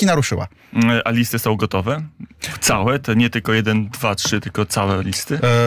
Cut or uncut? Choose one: uncut